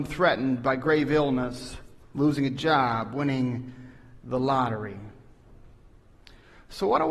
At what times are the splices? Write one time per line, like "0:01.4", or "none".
none